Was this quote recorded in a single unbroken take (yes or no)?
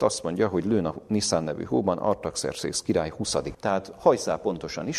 no